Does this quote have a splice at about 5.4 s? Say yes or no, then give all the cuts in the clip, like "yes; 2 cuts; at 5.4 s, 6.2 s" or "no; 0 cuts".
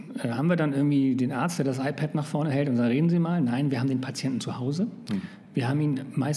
no; 0 cuts